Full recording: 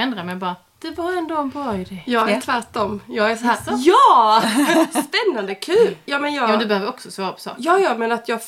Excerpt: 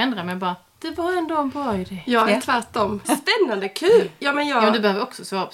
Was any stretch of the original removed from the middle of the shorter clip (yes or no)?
yes